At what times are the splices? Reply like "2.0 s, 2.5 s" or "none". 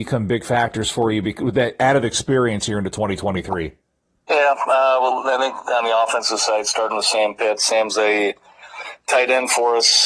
none